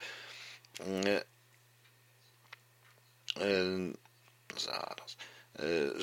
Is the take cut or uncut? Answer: uncut